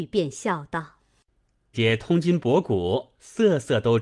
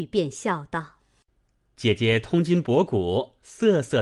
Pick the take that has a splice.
first; 1 cut; at 1.7 s

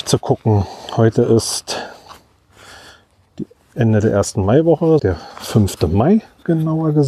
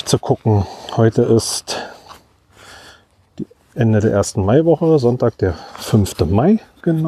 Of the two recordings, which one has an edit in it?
first; 1 cut; at 5.0 s

